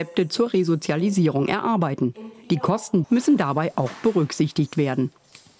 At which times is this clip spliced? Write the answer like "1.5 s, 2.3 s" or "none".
3.0 s